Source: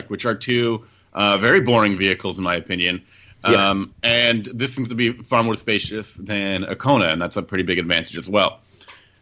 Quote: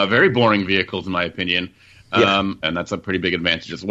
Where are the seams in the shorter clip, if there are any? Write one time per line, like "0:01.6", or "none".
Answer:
0:02.6